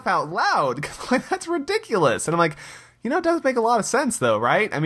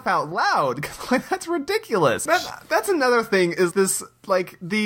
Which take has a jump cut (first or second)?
second